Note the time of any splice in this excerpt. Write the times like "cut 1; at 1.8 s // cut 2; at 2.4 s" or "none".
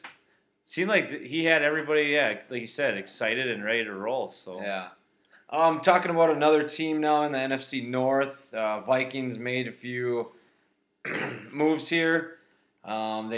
none